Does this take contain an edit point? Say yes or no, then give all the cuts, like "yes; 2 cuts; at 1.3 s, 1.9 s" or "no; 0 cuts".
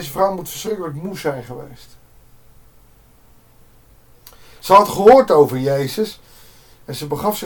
no; 0 cuts